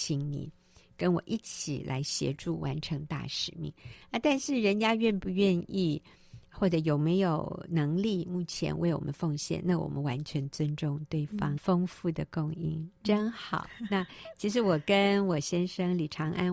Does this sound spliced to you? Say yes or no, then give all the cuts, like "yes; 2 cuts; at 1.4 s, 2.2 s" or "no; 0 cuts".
yes; 1 cut; at 11.6 s